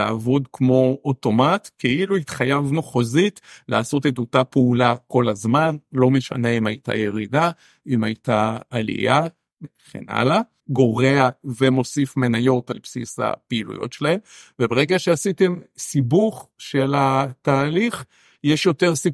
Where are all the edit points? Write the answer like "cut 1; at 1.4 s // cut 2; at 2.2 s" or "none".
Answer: cut 1; at 10.6 s